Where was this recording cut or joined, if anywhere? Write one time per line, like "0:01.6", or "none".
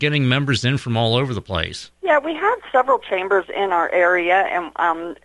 0:01.9

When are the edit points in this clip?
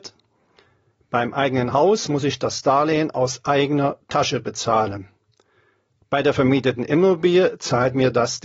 none

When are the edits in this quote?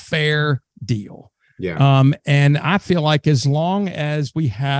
none

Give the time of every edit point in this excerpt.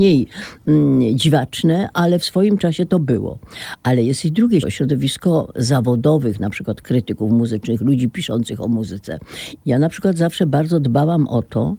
0:04.6
0:09.6

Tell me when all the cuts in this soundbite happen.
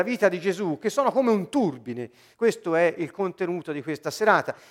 0:02.3

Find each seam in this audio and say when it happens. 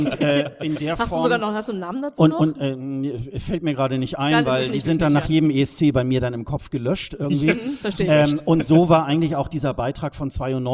none

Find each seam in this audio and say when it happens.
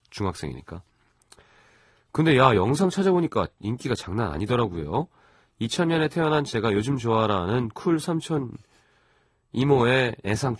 none

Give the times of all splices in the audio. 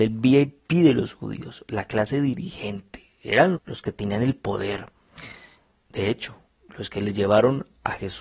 0:03.5

